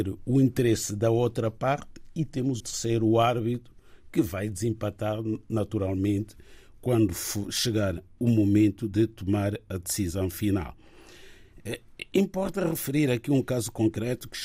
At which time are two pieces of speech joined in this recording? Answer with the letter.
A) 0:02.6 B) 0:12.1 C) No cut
A